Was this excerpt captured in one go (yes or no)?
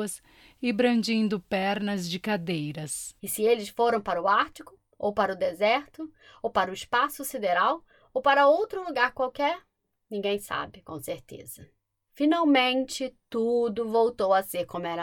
no